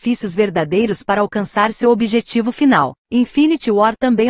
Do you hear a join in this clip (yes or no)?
yes